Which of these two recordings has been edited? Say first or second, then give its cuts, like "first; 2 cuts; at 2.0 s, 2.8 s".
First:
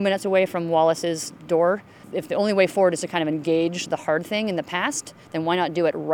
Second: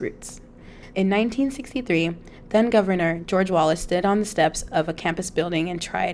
second; 1 cut; at 0.9 s